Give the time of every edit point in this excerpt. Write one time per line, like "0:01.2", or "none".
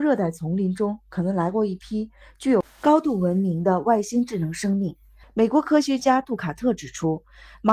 0:05.2